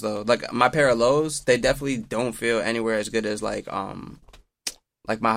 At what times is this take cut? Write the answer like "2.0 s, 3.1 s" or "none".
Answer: none

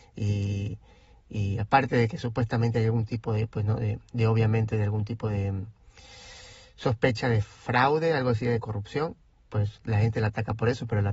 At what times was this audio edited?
none

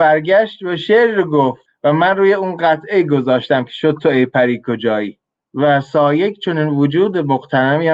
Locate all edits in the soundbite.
none

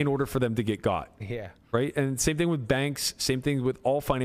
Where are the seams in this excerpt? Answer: none

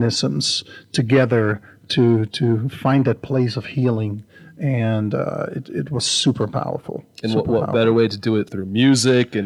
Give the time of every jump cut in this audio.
8.5 s

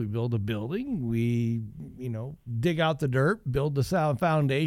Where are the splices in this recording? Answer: none

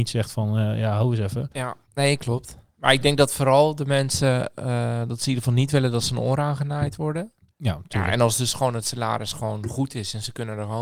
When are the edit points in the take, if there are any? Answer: 1.8 s, 7.5 s

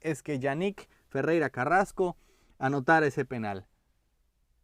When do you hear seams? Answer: none

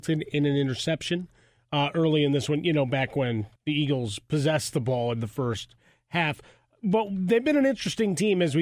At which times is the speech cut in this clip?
3.6 s

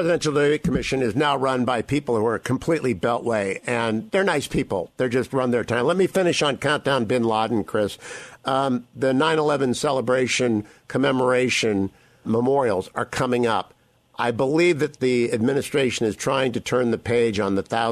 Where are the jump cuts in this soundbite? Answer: 12.2 s

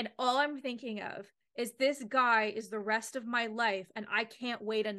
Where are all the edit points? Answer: none

